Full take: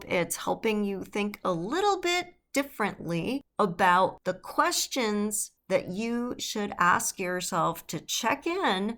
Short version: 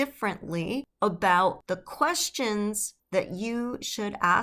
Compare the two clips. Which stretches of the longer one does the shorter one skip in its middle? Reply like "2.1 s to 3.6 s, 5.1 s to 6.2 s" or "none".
none